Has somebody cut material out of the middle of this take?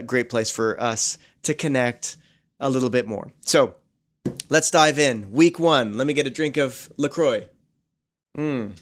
no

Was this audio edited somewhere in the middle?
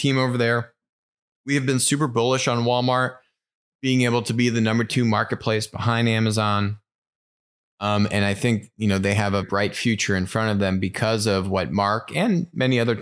yes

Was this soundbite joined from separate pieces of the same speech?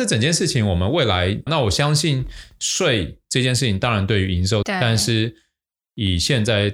yes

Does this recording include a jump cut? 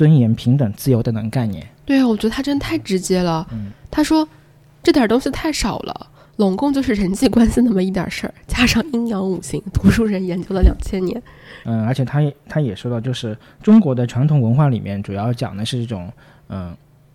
yes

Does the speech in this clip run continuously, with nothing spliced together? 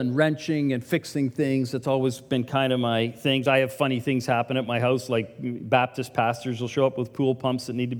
yes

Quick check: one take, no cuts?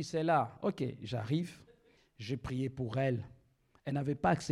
no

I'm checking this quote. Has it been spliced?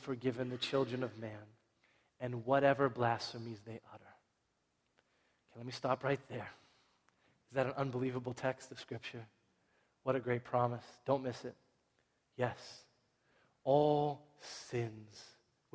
no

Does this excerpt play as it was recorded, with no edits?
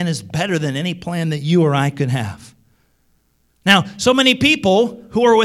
yes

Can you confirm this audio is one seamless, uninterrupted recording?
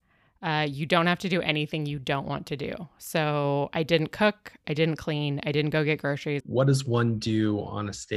no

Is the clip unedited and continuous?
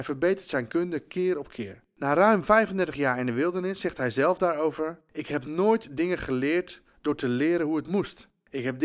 yes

